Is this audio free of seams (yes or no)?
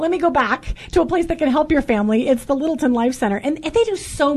yes